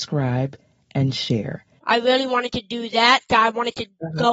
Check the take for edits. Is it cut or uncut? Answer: cut